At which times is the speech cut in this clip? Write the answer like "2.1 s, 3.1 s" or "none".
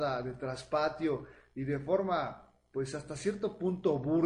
none